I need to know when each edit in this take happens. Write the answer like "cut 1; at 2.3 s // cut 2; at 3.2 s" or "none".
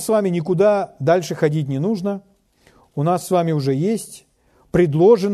none